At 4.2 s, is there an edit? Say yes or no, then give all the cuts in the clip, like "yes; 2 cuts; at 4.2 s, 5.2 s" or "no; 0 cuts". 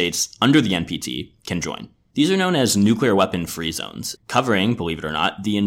yes; 2 cuts; at 2.1 s, 4.2 s